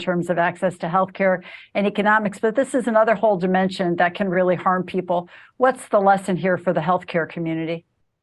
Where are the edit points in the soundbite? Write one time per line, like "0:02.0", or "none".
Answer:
none